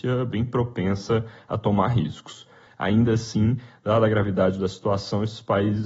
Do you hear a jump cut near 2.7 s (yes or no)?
yes